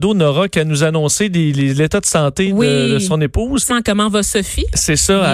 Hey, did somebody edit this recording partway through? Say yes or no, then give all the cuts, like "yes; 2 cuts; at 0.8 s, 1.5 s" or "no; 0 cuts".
yes; 1 cut; at 3.7 s